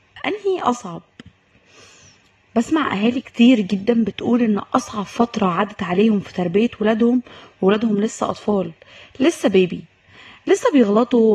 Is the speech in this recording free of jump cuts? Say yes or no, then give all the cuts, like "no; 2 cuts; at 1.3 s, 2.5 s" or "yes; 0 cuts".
yes; 0 cuts